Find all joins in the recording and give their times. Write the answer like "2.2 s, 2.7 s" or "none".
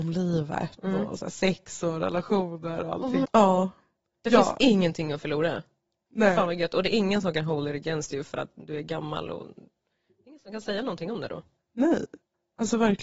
3.2 s